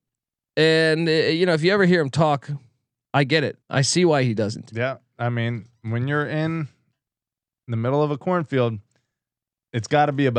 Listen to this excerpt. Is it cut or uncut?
cut